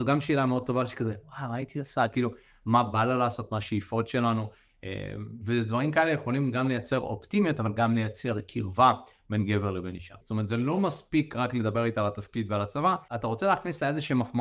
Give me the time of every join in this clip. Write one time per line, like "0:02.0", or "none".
0:10.2